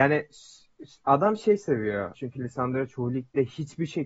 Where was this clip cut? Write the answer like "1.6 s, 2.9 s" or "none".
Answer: 2.1 s